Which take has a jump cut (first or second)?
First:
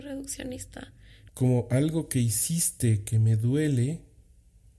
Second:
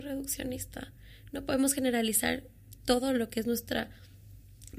first